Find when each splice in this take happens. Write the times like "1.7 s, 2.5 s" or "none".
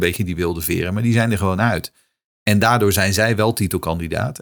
none

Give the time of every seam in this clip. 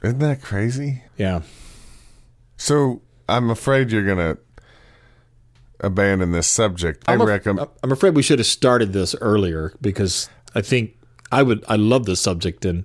1.1 s, 7.1 s

